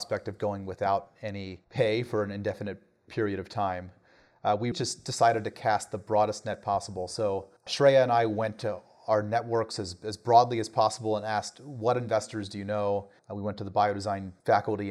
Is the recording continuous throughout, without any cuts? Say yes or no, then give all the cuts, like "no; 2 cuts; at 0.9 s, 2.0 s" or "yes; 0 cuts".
no; 1 cut; at 4.7 s